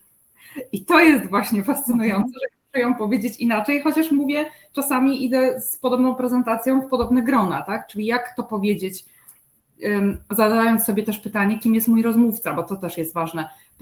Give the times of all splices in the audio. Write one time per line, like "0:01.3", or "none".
none